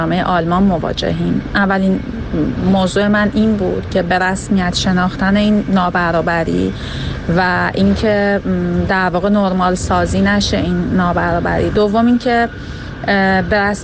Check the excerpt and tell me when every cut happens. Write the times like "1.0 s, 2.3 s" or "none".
none